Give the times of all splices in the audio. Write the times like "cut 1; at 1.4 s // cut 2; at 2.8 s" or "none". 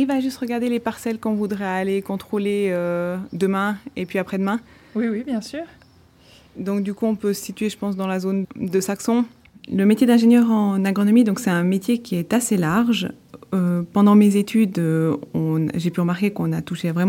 cut 1; at 8.4 s

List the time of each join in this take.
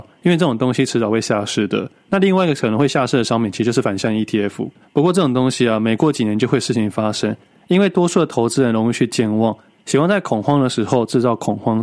cut 1; at 4.8 s

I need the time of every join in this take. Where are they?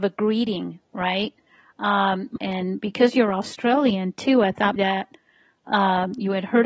cut 1; at 2.4 s // cut 2; at 4.8 s

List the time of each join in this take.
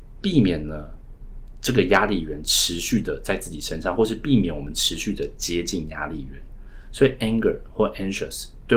none

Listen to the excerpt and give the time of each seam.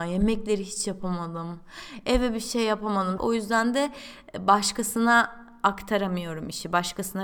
cut 1; at 3.2 s

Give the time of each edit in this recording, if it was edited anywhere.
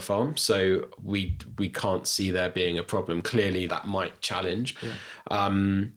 cut 1; at 3.7 s // cut 2; at 4.8 s

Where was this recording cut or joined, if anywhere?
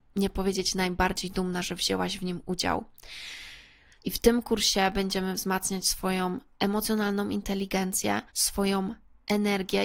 cut 1; at 4.0 s // cut 2; at 8.3 s

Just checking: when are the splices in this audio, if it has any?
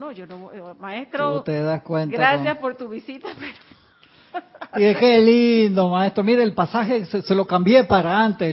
none

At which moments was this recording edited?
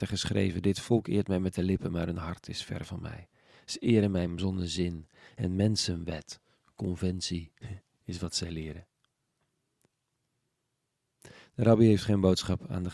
none

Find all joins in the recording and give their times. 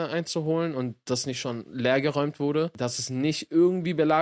none

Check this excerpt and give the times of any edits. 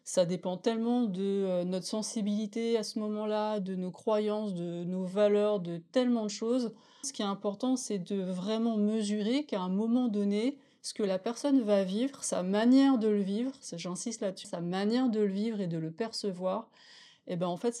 cut 1; at 7.0 s // cut 2; at 14.4 s

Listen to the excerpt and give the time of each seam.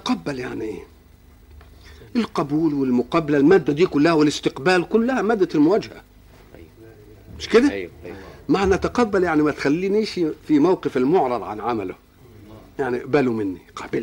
cut 1; at 10.4 s

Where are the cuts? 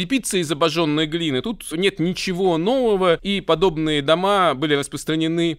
none

